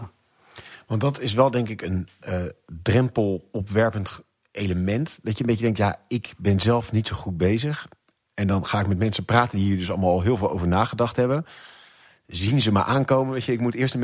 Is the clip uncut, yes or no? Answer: yes